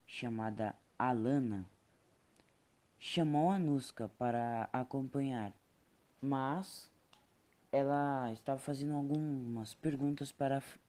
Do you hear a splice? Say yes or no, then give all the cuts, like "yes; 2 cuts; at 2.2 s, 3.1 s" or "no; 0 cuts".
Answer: yes; 1 cut; at 6.1 s